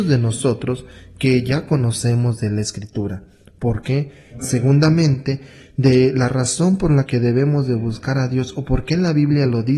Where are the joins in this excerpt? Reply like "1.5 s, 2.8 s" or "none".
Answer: 4.4 s